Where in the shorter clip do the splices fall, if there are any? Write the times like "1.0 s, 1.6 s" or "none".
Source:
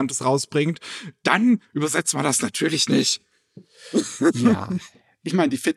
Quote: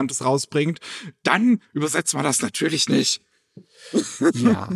none